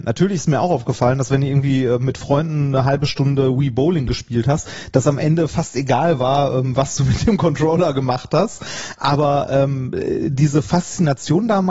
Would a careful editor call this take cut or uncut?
uncut